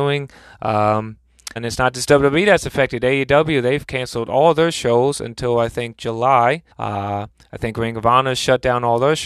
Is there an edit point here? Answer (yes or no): yes